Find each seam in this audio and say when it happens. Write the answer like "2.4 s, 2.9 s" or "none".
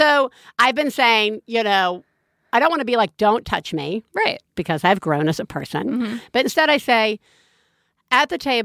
none